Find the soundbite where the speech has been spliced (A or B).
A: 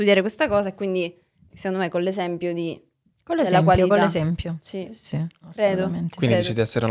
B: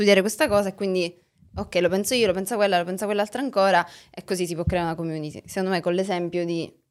A